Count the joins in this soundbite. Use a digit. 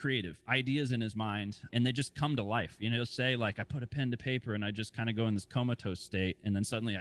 1